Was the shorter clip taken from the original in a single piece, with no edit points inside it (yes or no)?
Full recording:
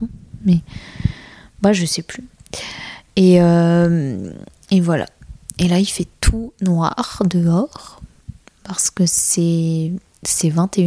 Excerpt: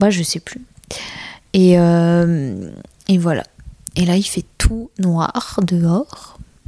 yes